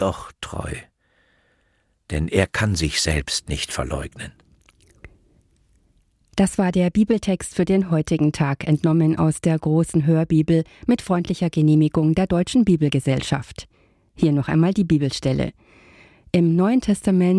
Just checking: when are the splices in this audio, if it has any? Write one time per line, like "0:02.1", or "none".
none